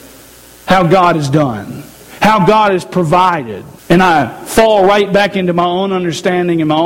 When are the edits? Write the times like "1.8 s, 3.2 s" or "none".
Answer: 3.8 s